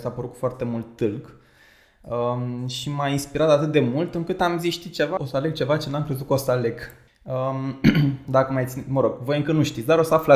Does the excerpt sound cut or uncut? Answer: cut